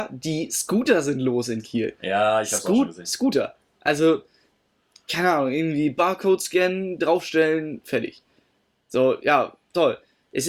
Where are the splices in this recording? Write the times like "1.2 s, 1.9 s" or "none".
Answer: none